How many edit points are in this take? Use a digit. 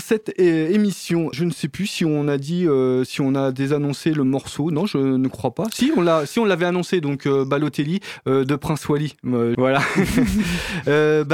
2